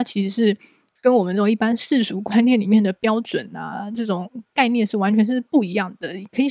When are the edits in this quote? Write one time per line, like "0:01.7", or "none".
0:05.5